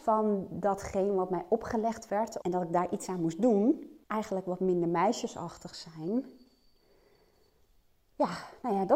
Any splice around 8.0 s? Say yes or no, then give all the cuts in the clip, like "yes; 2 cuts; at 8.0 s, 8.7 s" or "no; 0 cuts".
no; 2 cuts; at 2.4 s, 4.0 s